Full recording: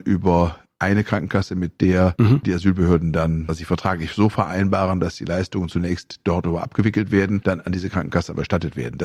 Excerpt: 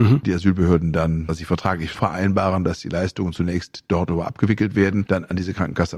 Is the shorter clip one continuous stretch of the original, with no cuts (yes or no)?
no